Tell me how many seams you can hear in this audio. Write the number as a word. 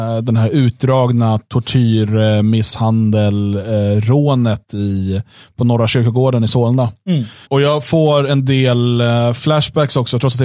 one